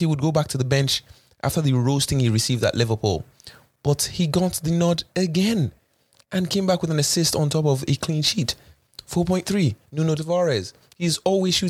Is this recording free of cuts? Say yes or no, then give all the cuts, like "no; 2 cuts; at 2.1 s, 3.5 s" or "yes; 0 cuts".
yes; 0 cuts